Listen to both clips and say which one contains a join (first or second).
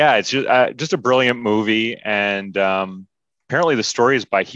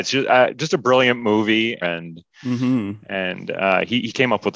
second